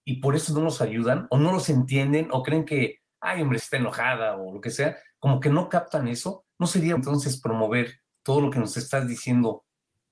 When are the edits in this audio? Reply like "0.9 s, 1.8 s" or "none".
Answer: 3.6 s, 7.0 s